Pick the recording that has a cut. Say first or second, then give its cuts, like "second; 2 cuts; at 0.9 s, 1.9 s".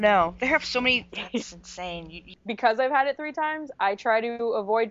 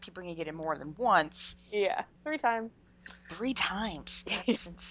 first; 1 cut; at 1.1 s